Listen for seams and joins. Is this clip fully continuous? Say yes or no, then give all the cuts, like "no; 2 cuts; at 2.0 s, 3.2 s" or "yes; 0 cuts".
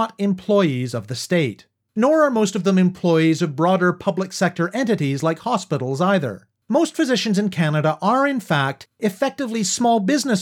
yes; 0 cuts